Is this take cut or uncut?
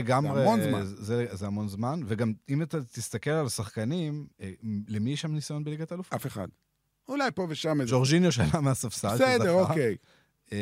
uncut